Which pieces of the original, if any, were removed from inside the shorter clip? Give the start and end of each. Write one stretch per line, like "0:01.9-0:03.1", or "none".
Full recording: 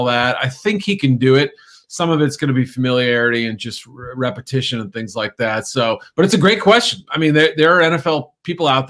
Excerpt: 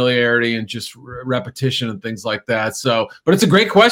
none